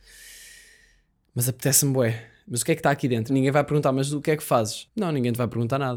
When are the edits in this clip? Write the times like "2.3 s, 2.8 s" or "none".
3.3 s, 4.9 s